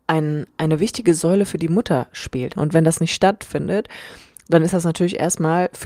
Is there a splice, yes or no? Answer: yes